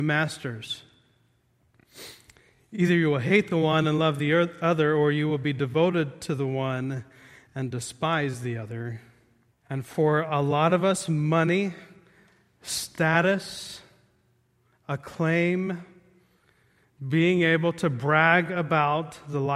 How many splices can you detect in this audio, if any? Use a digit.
1